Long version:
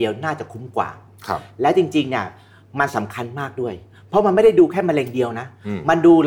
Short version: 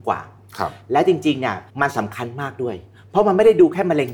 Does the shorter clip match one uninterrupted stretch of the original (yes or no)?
no